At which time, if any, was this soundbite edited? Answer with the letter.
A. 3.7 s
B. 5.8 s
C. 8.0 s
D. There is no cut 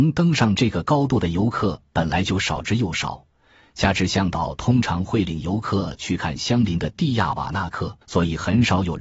C